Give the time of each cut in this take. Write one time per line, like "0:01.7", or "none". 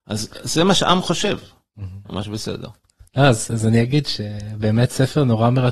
0:02.1